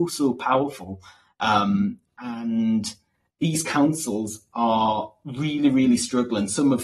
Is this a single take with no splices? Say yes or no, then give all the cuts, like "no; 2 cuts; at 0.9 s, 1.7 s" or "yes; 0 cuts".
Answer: yes; 0 cuts